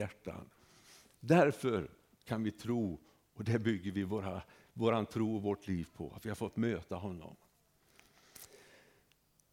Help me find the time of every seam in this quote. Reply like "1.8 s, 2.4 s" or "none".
none